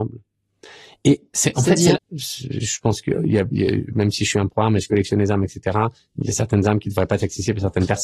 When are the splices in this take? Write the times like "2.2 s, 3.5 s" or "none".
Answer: 1.9 s